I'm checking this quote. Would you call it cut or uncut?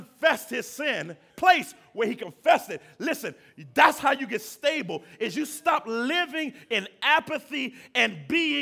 cut